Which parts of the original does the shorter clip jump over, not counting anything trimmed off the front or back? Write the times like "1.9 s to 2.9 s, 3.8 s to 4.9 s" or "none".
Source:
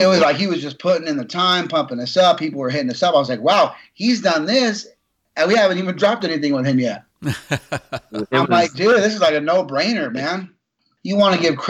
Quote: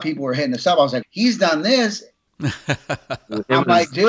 3.4 s to 3.9 s, 5.1 s to 7.1 s